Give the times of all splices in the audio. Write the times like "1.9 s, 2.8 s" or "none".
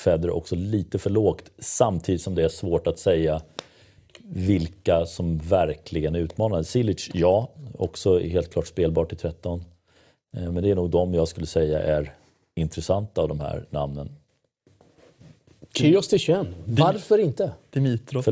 none